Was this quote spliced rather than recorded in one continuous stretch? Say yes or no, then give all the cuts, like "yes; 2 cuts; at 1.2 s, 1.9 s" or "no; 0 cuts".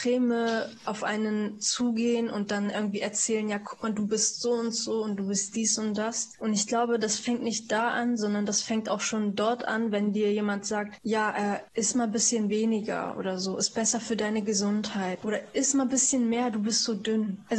yes; 1 cut; at 15.2 s